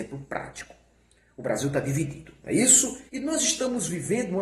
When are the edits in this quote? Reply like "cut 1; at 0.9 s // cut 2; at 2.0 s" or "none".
cut 1; at 3.1 s